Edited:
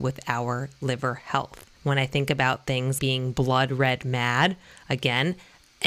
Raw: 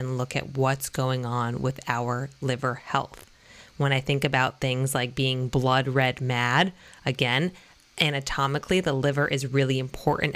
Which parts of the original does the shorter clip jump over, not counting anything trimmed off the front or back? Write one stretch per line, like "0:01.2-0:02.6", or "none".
0:03.4-0:03.7
0:04.9-0:05.1